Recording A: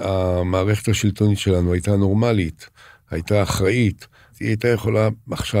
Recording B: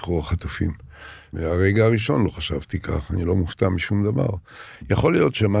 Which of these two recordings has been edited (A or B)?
B